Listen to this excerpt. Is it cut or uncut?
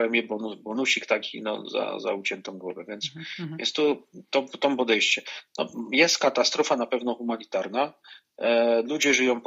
uncut